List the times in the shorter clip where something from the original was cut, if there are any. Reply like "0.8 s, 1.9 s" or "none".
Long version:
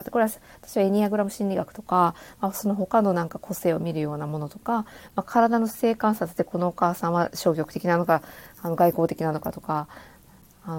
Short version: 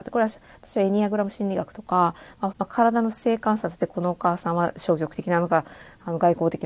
2.5 s